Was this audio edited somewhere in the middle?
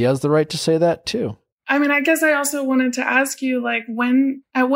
no; 0 cuts

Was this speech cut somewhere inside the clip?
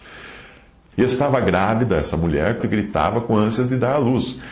yes; 2 cuts; at 0.9 s, 2.6 s

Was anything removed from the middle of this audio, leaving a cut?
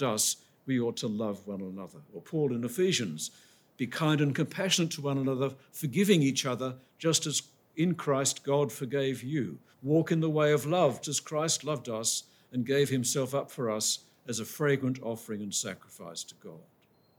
yes; 3 cuts; at 2.1 s, 9.7 s, 11.0 s

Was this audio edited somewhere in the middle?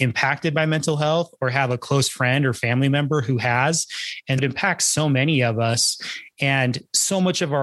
yes; 1 cut; at 4.4 s

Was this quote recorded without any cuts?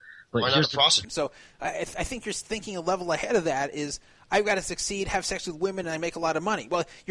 no; 2 cuts; at 1.0 s, 5.8 s

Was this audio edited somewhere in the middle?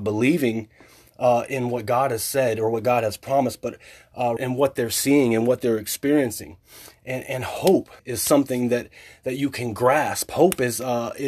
yes; 2 cuts; at 4.4 s, 8.0 s

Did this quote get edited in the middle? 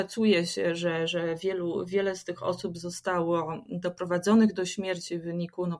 no; 0 cuts

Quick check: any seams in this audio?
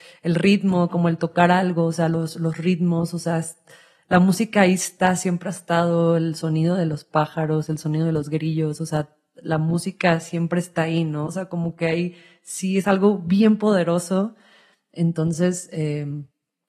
yes; 1 cut; at 11.3 s

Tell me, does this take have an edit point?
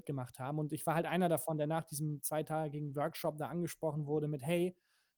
no; 0 cuts

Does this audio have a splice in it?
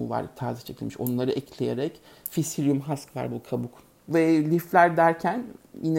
yes; 1 cut; at 4.0 s

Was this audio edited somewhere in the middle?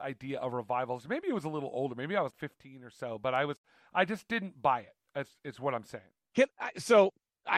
yes; 1 cut; at 2.3 s

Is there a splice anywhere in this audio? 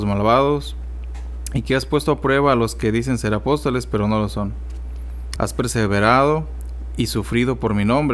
yes; 1 cut; at 5.4 s

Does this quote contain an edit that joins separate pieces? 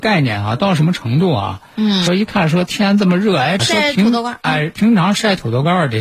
yes; 2 cuts; at 2.1 s, 3.6 s

